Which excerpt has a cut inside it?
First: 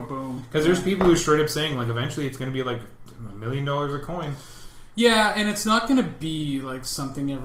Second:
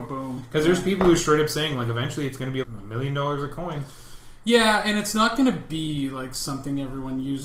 second; 1 cut; at 2.6 s

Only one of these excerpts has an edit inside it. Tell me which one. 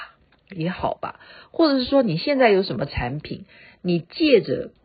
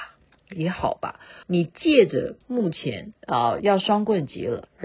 second; 2 cuts; at 1.4 s, 3.2 s

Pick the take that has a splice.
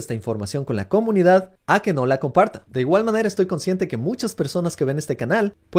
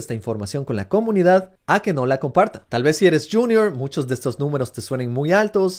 second; 1 cut; at 2.7 s

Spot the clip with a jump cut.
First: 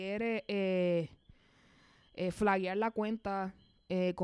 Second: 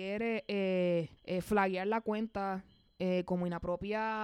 second; 1 cut; at 1.2 s

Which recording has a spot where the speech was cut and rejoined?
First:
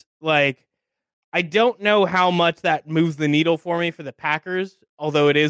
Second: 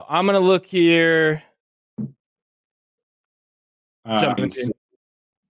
second; 1 cut; at 4.4 s

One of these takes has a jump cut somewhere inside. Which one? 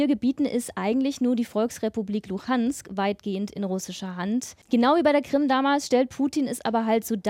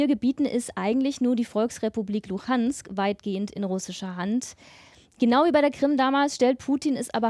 first; 1 cut; at 4.6 s

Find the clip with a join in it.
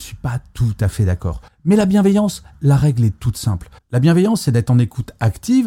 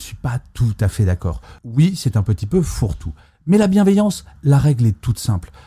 first; 2 cuts; at 1.5 s, 3.8 s

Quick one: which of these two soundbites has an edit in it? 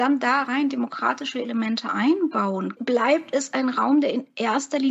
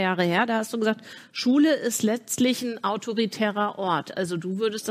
first; 1 cut; at 2.8 s

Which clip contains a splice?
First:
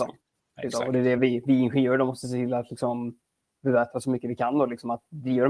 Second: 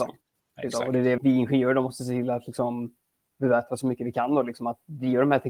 second; 1 cut; at 1.2 s

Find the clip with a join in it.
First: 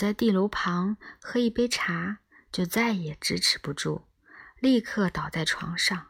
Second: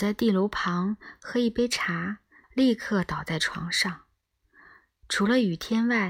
second; 1 cut; at 2.4 s

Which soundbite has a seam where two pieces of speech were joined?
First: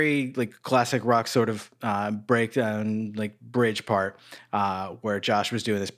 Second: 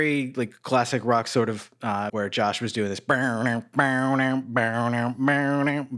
second; 1 cut; at 2.1 s

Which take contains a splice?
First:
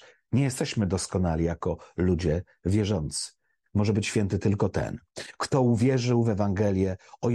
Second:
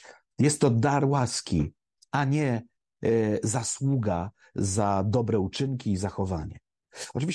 first; 1 cut; at 3.7 s

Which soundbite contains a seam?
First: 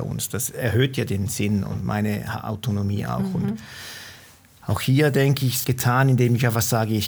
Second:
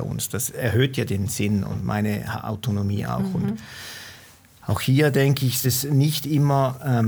first; 1 cut; at 5.6 s

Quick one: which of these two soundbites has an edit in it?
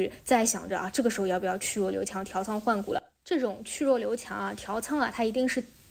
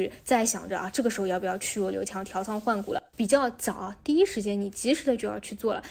second; 1 cut; at 3.1 s

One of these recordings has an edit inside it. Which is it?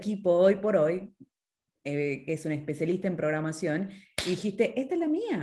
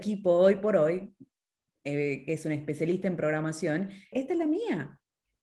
second; 1 cut; at 4.1 s

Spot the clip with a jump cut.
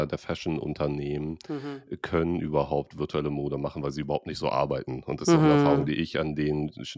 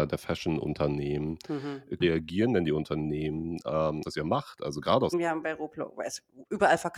second; 3 cuts; at 2.0 s, 4.0 s, 5.1 s

